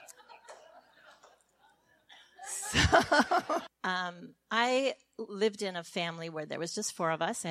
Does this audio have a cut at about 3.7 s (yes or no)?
yes